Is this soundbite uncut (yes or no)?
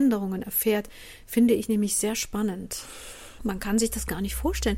no